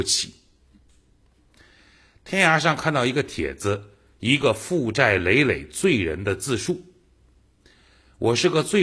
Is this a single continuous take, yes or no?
yes